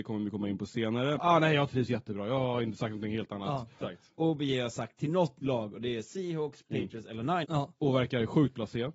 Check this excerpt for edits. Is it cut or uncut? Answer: cut